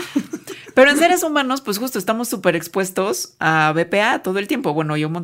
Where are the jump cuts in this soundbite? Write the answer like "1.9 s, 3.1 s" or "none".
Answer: none